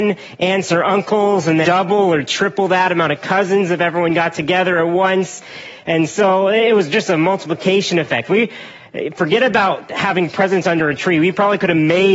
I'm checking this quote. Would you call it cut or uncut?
cut